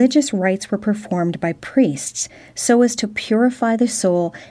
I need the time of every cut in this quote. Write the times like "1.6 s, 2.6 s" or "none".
none